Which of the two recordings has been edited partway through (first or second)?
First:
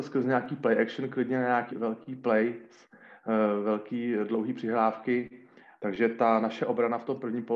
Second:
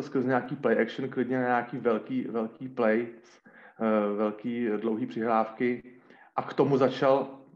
first